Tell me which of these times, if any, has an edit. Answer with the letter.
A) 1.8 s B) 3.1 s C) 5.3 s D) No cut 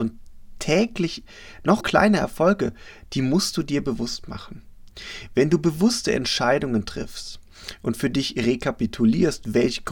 A